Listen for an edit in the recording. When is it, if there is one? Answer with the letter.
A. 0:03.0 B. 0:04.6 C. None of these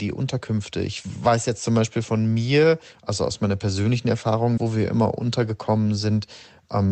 B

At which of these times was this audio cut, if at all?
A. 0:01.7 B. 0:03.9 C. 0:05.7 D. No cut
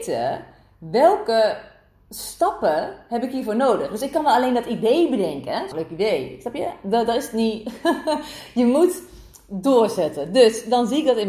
C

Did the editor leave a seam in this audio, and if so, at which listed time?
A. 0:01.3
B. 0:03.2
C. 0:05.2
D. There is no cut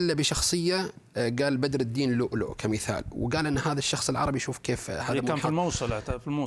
D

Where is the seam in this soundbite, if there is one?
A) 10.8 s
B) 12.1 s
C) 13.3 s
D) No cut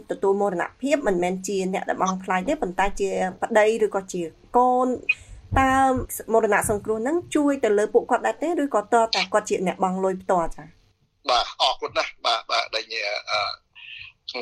D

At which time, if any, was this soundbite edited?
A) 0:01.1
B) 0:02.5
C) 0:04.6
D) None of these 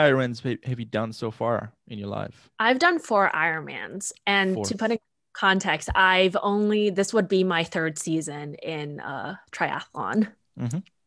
B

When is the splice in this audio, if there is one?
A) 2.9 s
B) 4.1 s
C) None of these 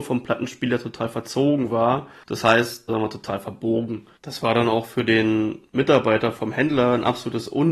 A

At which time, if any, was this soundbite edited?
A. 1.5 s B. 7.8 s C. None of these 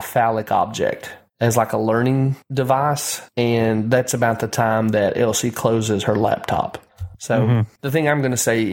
B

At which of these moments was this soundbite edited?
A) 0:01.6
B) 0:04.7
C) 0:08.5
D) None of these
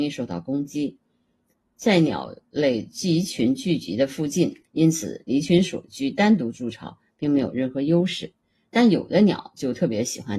B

